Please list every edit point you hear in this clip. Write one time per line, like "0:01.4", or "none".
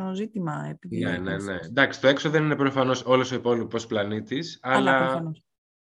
none

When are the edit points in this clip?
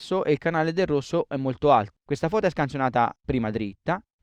0:02.0

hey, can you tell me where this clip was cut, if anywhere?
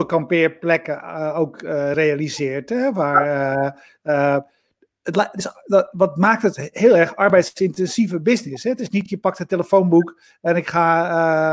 none

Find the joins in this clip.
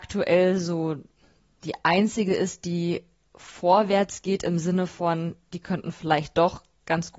none

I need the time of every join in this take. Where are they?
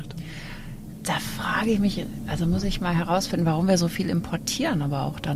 none

